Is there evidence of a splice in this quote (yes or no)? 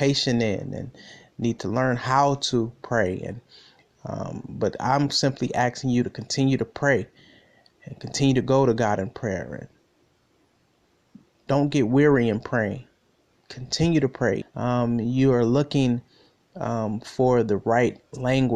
yes